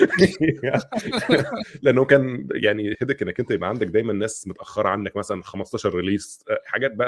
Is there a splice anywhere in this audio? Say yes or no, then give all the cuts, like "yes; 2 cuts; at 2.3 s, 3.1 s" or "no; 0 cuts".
yes; 1 cut; at 2.9 s